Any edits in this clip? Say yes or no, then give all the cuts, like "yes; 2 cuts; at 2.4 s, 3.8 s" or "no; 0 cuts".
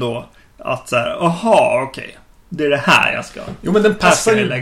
no; 0 cuts